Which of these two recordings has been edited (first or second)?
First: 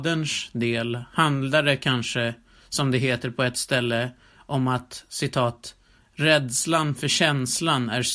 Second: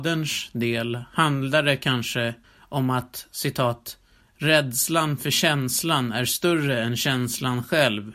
second